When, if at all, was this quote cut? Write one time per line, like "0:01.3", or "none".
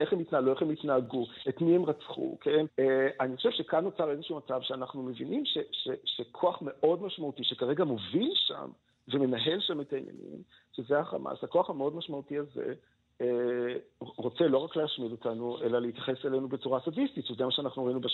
0:02.7